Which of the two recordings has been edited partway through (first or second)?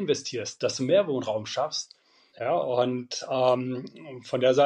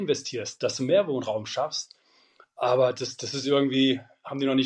first